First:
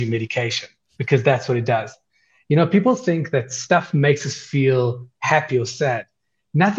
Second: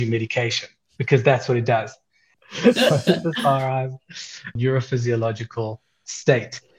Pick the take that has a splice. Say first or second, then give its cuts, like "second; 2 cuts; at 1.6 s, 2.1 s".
second; 2 cuts; at 2.3 s, 4.6 s